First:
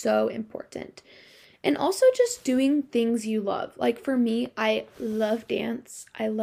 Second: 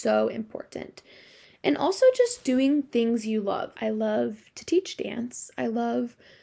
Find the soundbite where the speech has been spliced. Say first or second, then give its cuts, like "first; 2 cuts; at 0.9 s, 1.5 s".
second; 1 cut; at 3.7 s